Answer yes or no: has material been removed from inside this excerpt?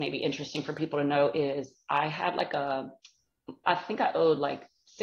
yes